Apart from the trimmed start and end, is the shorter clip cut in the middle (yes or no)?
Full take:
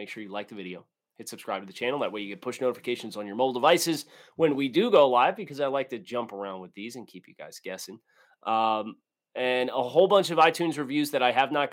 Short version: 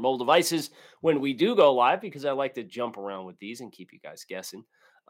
no